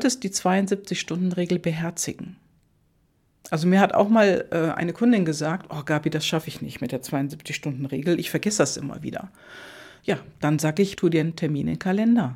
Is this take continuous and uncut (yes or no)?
no